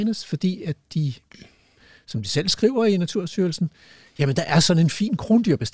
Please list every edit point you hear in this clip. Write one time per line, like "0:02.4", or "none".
none